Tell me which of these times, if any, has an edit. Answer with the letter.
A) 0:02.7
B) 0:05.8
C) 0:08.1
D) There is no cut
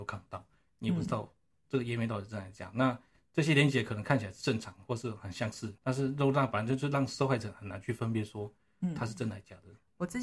B